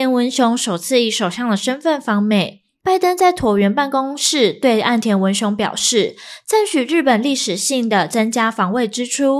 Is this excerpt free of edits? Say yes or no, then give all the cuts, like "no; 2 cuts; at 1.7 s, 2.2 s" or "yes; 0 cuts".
yes; 0 cuts